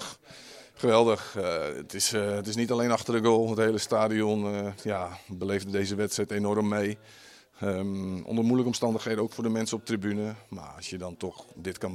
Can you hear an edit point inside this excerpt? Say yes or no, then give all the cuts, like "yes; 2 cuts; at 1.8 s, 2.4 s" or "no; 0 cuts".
no; 0 cuts